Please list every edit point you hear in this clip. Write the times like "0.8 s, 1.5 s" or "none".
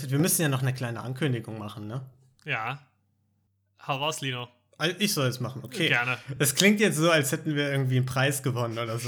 none